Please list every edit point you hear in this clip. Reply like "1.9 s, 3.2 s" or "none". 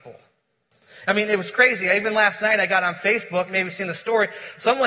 1.1 s, 3.5 s